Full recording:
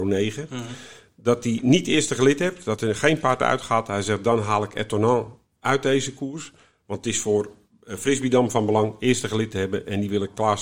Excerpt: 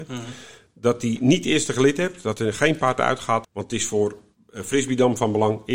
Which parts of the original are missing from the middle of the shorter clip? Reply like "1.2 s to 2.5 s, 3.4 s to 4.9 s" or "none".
3.9 s to 6.8 s

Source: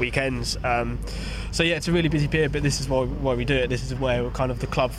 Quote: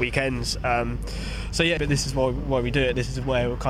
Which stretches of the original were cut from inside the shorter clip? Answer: 1.8 s to 2.5 s

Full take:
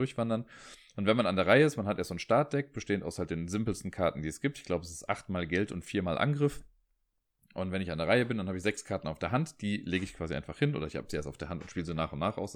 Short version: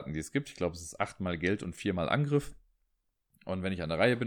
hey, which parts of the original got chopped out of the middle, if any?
none

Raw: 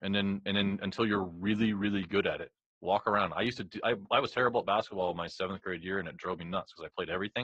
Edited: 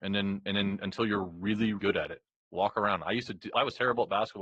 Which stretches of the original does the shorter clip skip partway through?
1.8 s to 2.1 s, 3.8 s to 4.1 s

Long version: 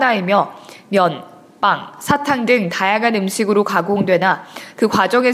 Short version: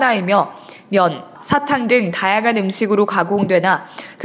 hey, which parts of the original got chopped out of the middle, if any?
1.3 s to 1.9 s

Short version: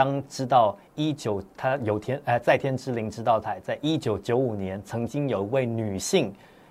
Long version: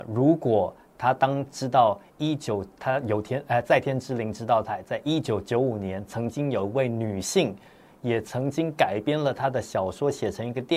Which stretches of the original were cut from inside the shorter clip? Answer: none

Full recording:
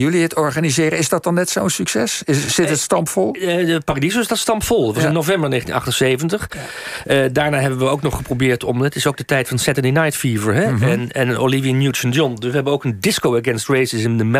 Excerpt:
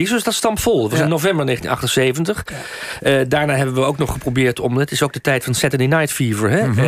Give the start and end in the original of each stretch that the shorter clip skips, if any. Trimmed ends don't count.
none

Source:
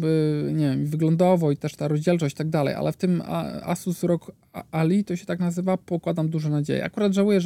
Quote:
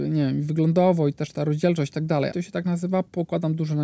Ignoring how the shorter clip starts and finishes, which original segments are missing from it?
2.7 s to 5.0 s

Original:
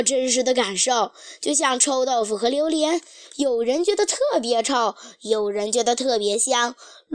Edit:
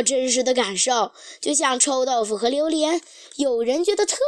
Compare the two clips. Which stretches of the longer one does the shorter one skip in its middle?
none

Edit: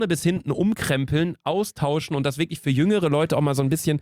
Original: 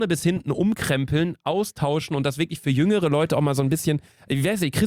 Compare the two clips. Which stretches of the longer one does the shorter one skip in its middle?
none

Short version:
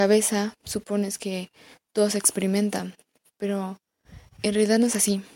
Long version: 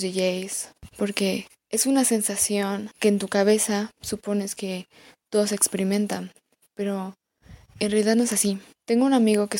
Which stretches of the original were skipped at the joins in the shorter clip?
none

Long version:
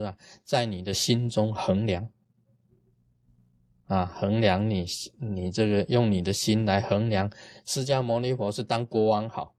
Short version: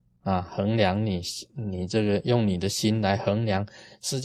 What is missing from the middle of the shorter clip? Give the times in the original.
none

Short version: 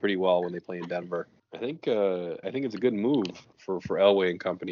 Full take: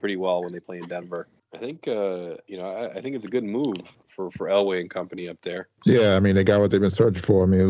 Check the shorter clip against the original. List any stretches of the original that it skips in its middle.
2.4 s to 2.9 s

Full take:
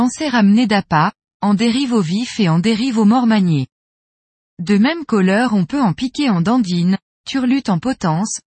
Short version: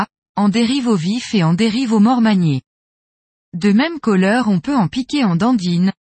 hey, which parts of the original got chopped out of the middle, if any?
none

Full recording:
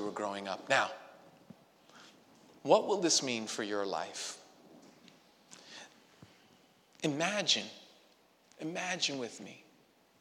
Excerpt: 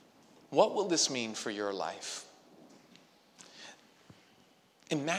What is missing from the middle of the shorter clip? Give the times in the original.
none

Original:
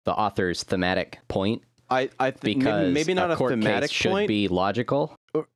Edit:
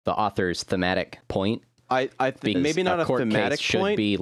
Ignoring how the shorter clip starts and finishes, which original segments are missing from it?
2.5 s to 2.9 s

